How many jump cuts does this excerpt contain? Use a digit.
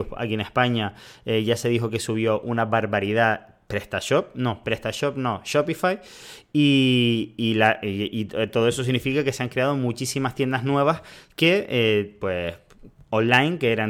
0